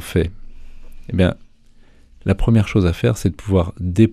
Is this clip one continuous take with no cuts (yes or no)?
yes